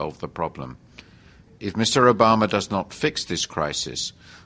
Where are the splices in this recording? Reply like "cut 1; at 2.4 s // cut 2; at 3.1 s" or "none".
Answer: cut 1; at 1.5 s